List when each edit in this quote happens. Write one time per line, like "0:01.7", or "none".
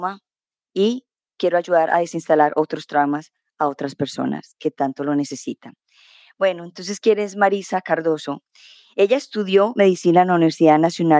none